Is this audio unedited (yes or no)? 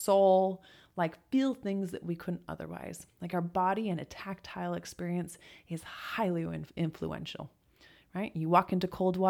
yes